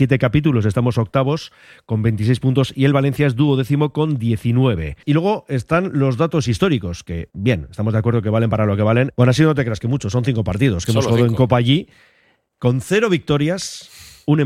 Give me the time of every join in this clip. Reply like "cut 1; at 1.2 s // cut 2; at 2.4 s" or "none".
cut 1; at 9.1 s